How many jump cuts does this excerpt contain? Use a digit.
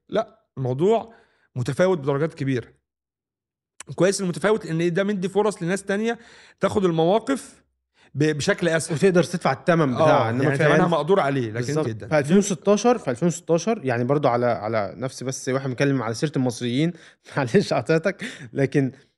1